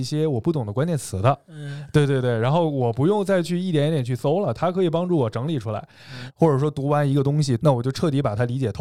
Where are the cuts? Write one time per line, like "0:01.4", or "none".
0:06.3
0:07.6